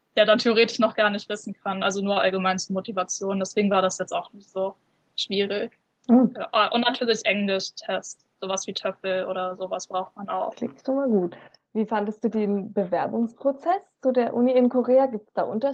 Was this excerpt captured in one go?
yes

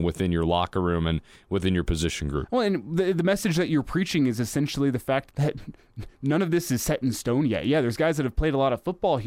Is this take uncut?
no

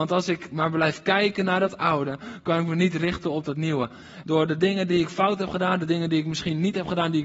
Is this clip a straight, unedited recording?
no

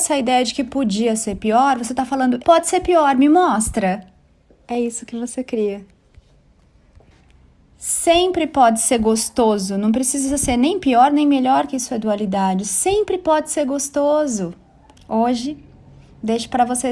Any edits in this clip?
yes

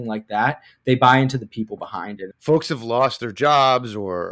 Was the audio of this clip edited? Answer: yes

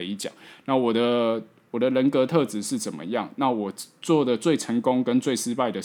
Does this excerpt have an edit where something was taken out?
no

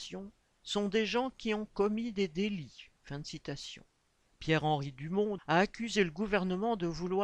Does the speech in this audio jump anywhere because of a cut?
yes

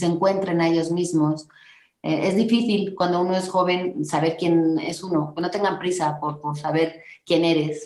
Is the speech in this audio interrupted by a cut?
no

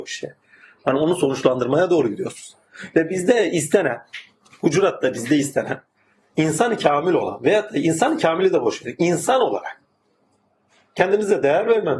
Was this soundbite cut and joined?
no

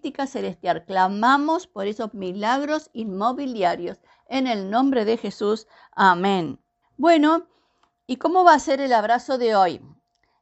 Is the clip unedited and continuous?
no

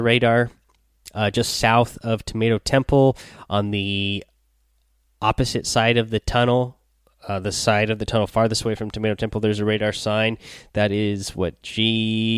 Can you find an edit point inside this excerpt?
no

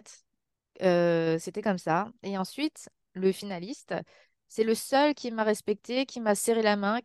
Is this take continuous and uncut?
yes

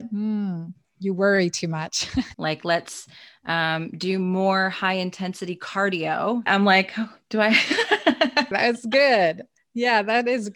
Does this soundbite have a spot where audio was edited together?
yes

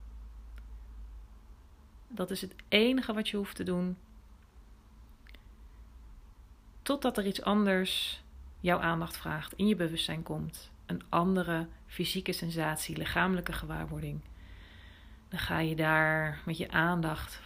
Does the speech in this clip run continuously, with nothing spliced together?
no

